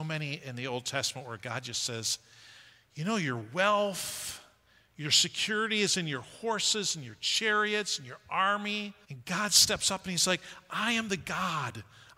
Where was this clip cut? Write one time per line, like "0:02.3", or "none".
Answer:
0:09.0